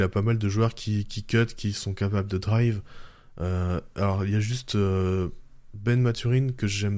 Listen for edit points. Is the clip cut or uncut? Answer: uncut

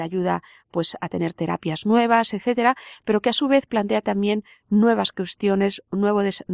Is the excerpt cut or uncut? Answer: uncut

